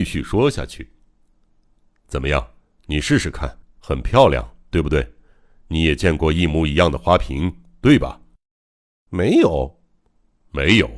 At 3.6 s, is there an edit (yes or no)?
yes